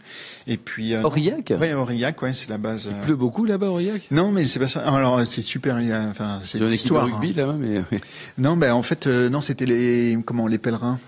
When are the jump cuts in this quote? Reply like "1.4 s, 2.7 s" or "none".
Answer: none